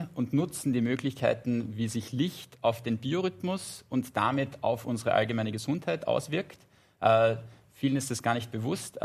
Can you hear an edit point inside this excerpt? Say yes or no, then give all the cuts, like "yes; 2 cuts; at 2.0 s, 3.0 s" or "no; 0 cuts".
no; 0 cuts